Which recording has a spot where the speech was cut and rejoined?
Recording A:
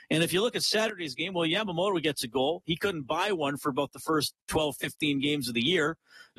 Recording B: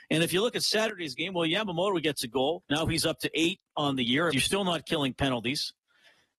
B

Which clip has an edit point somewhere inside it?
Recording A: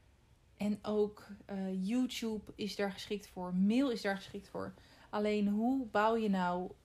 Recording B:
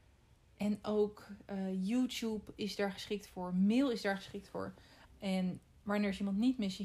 B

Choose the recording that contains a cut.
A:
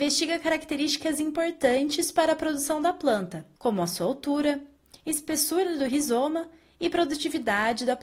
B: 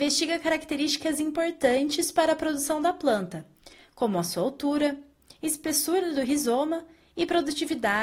A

